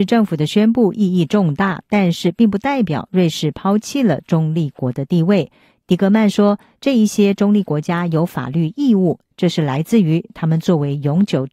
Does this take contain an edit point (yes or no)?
no